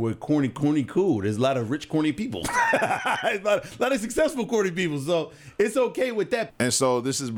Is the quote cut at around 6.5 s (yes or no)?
yes